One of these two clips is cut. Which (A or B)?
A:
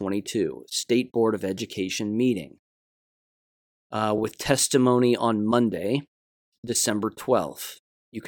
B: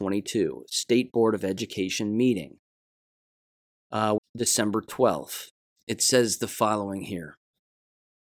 B